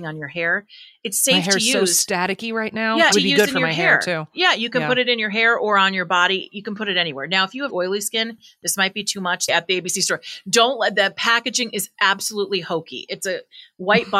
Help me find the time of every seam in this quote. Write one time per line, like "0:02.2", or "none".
0:03.1
0:07.7
0:09.5

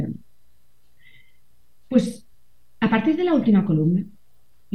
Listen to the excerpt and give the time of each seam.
none

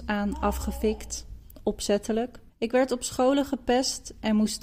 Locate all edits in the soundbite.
0:02.5

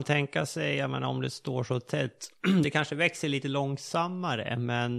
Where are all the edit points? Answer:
none

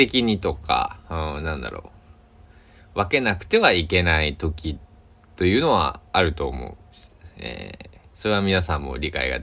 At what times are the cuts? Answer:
none

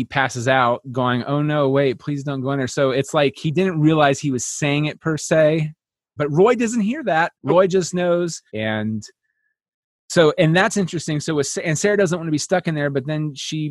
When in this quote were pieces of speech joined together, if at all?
0:06.2
0:07.3
0:08.5

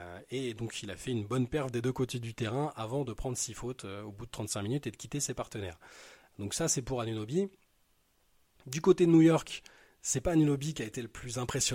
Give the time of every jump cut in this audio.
none

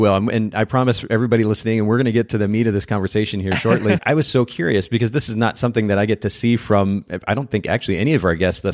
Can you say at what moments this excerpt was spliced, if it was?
0:04.0

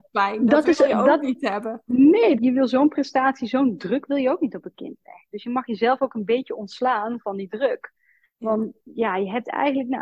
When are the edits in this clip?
0:02.4

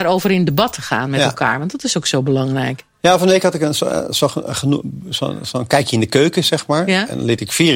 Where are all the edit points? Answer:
none

